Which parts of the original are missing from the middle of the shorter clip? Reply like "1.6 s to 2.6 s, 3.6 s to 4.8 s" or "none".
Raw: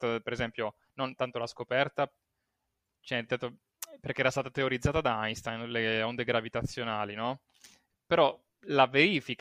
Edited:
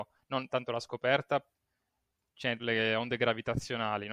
3.3 s to 5.7 s